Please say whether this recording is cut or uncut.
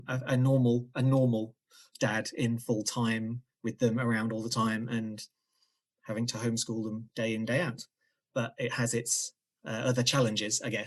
uncut